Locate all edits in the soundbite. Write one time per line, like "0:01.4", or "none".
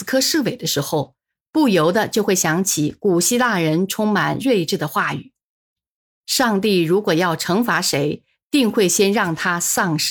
none